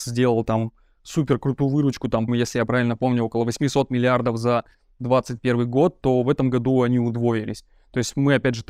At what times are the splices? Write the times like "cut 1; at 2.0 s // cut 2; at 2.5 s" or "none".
cut 1; at 2.3 s